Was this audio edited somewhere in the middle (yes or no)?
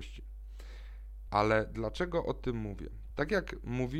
yes